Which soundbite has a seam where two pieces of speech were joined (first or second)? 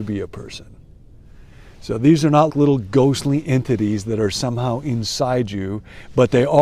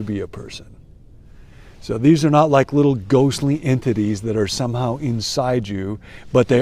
first